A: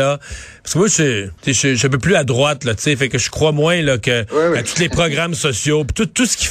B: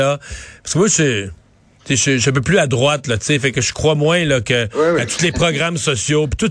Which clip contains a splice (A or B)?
A